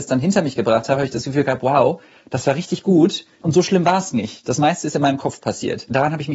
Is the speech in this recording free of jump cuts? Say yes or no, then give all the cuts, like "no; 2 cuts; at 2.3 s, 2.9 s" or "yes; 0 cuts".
yes; 0 cuts